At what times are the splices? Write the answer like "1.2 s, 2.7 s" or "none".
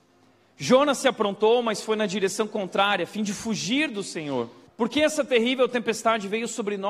4.7 s